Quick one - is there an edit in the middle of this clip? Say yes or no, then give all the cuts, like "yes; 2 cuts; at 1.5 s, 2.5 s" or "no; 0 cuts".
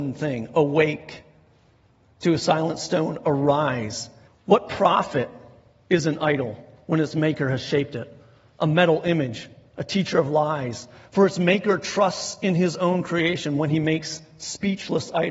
yes; 1 cut; at 4.3 s